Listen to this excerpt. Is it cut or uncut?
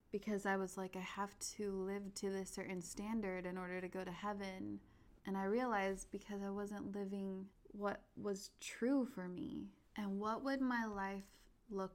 cut